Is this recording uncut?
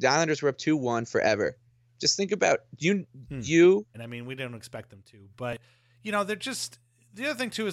no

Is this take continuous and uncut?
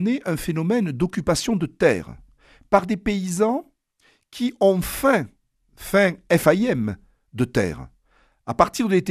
yes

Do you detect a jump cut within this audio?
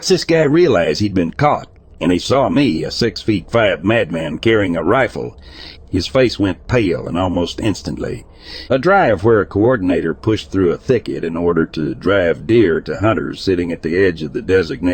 yes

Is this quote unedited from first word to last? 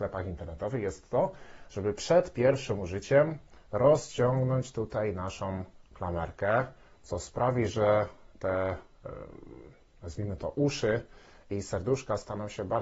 yes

